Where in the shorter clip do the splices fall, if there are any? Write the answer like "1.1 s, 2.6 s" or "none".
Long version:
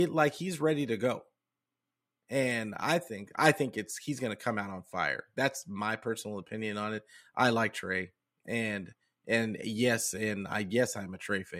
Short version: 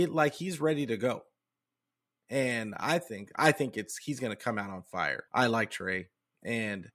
5.3 s